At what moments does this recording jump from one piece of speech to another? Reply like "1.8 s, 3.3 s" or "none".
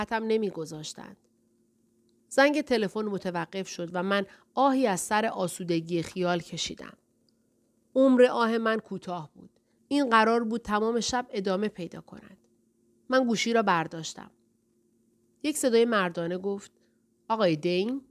9.8 s